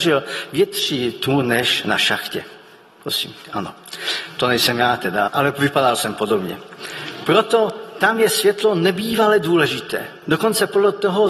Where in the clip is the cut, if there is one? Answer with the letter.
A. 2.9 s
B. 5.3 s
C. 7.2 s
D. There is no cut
B